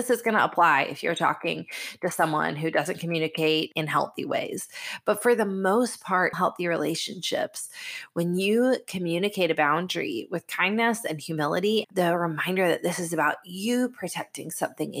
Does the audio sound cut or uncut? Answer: cut